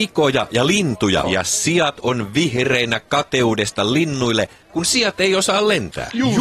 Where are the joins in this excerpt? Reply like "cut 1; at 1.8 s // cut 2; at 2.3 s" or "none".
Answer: cut 1; at 1.2 s